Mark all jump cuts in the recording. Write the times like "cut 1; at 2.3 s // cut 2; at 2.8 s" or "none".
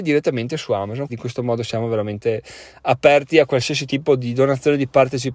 cut 1; at 1.1 s